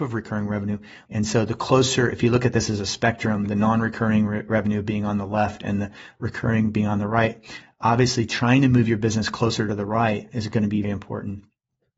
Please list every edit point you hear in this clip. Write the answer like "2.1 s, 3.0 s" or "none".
1.1 s, 10.8 s